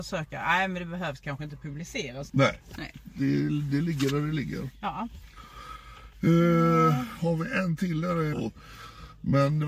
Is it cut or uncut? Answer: cut